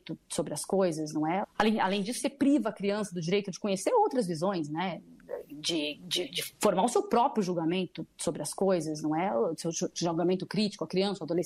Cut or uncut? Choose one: cut